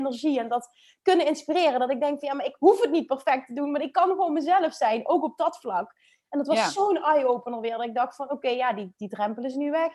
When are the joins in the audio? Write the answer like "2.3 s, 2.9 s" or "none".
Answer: none